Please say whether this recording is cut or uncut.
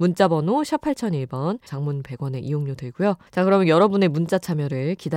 cut